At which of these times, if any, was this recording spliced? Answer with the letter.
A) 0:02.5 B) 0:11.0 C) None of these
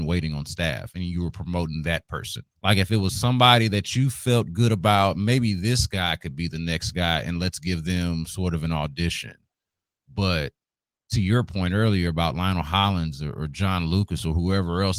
A